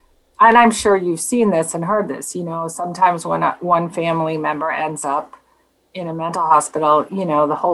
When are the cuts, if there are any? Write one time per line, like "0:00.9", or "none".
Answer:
none